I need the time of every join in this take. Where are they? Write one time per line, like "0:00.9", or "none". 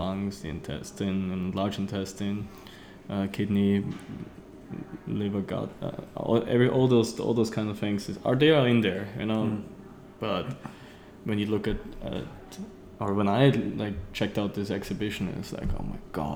none